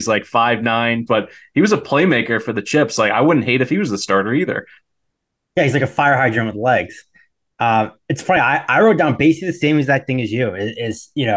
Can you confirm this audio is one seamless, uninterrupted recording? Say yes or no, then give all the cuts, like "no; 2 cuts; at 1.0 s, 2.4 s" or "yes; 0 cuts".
no; 1 cut; at 1.1 s